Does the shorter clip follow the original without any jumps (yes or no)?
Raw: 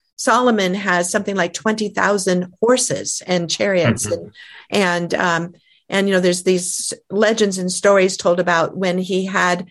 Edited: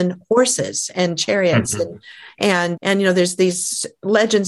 no